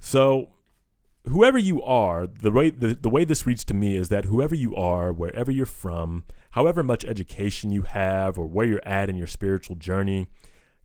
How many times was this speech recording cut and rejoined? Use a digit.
0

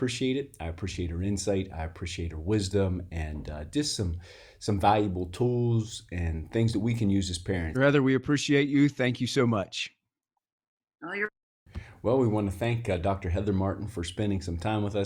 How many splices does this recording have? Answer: 1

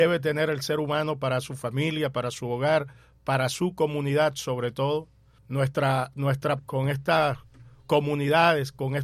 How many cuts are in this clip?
2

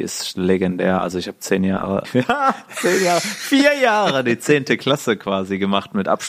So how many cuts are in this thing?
1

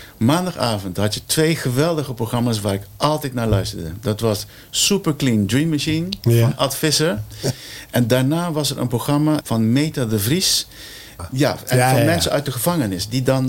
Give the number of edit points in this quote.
2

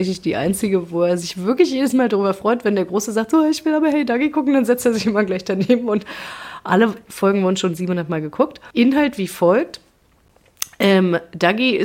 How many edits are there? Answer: 1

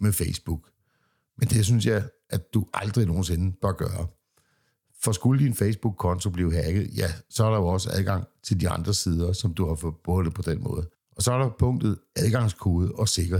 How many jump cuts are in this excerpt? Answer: 1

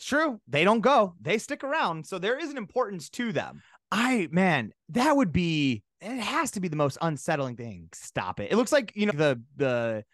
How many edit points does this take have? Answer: 2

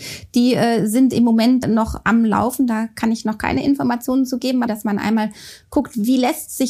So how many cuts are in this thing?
2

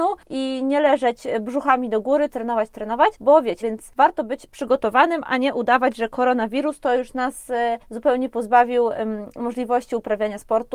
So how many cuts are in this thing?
2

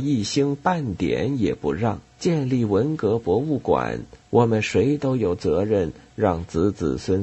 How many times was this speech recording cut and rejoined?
2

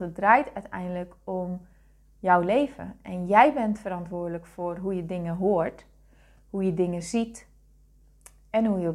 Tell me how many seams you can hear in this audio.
0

